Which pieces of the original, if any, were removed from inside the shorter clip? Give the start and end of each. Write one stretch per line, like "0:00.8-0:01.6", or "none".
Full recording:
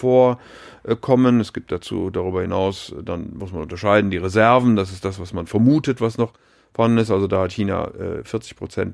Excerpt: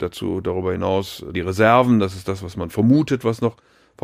0:03.0-0:04.1